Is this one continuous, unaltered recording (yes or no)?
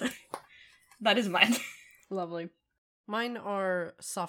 yes